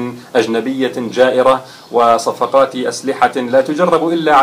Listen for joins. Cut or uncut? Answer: uncut